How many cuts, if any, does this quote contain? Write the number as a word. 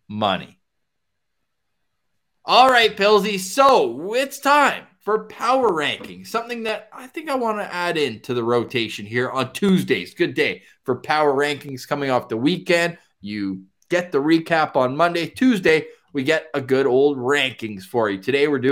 zero